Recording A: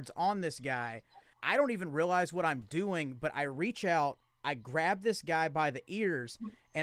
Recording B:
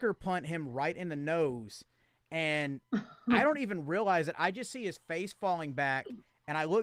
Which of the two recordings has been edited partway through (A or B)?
A